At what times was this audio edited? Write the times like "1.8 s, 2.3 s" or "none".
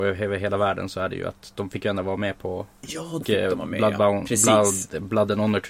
3.2 s